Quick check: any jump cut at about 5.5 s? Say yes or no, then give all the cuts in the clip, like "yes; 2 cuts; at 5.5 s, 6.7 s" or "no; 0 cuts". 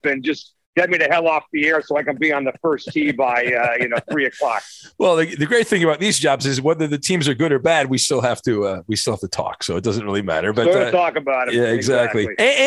no; 0 cuts